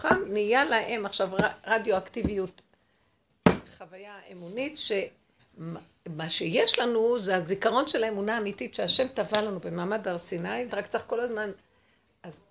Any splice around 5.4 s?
yes; 2 cuts; at 5.4 s, 10.7 s

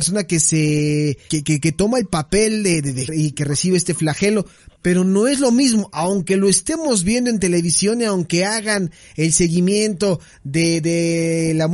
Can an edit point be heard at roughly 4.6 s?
no; 2 cuts; at 1.3 s, 3.1 s

